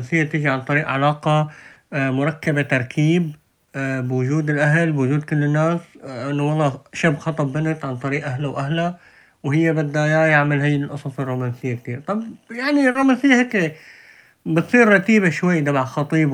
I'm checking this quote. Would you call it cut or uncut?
uncut